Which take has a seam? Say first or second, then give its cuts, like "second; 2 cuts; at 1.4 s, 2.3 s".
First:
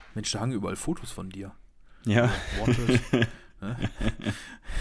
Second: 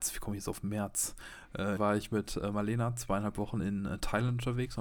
second; 1 cut; at 1.8 s